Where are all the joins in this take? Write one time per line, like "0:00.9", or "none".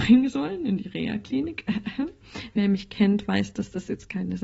none